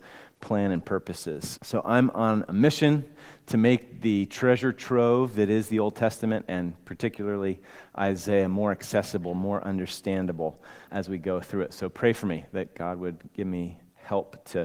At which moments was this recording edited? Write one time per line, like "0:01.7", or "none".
0:01.6
0:10.9